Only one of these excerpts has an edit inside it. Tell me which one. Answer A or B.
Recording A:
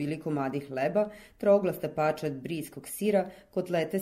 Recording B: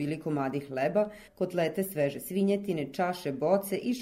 B